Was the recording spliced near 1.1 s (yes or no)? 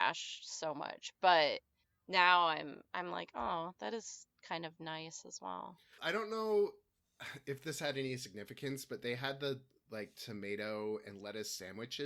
no